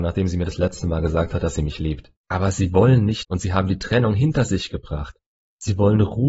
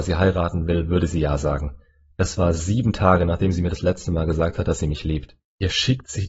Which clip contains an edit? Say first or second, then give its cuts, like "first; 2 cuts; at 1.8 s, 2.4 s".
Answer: first; 2 cuts; at 2.2 s, 3.2 s